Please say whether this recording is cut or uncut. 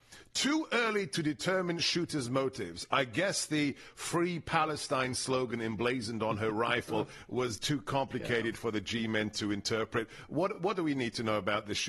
uncut